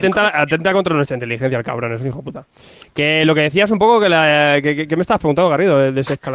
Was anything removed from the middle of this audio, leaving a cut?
no; 0 cuts

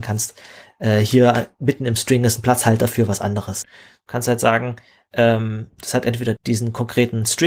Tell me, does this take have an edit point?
yes; 2 cuts; at 3.6 s, 6.4 s

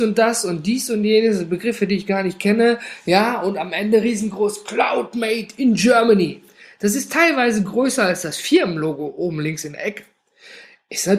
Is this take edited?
no; 0 cuts

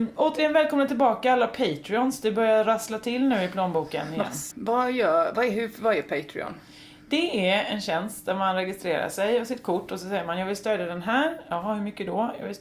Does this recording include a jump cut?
yes; 1 cut; at 4.5 s

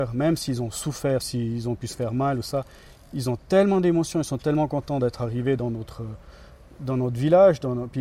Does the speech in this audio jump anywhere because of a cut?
yes; 1 cut; at 1.2 s

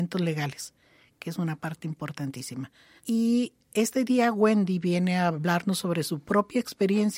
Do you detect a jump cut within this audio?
yes; 1 cut; at 3.0 s

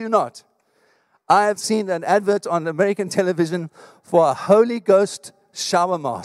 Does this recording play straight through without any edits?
no; 1 cut; at 1.6 s

